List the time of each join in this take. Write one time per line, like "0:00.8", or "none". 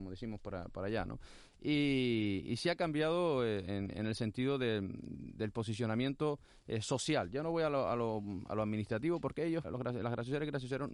0:09.6